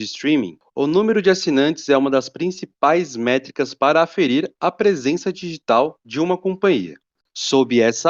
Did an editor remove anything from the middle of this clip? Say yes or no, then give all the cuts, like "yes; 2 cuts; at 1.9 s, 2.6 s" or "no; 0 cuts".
no; 0 cuts